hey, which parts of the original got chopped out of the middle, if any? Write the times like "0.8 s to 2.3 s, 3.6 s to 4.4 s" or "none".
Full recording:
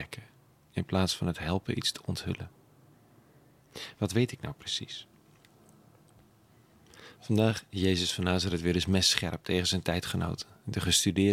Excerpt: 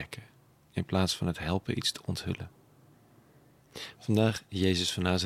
3.9 s to 7.1 s